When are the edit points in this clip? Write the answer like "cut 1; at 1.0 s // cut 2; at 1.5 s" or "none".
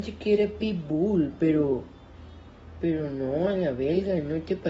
none